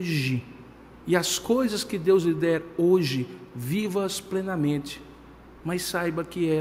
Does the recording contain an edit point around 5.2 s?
no; 1 cut; at 0.9 s

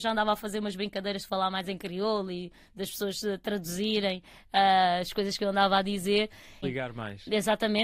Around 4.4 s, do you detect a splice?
no; 1 cut; at 6.6 s

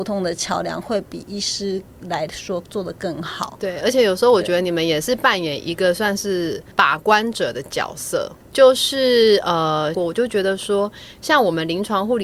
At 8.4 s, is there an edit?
yes; 3 cuts; at 6.7 s, 8.4 s, 9.9 s

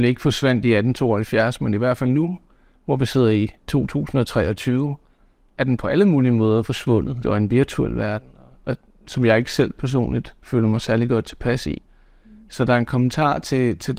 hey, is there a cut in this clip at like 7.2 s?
yes; 1 cut; at 7.2 s

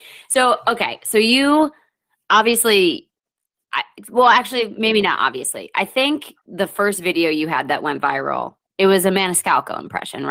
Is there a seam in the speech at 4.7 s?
no; 0 cuts

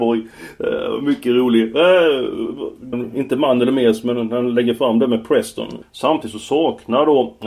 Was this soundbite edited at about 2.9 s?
yes; 2 cuts; at 2.9 s, 5.8 s

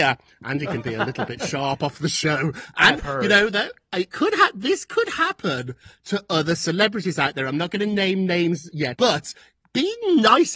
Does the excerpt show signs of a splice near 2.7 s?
no; 1 cut; at 8.9 s

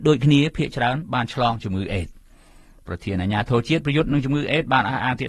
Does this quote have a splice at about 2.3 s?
no; 0 cuts

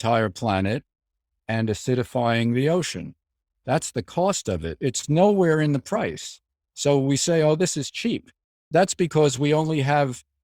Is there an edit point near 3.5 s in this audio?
no; 0 cuts

